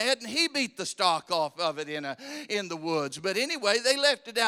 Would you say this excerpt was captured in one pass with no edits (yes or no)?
yes